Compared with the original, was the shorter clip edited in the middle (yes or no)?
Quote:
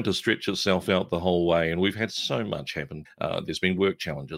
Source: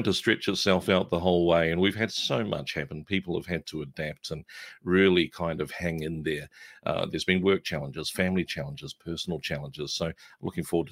yes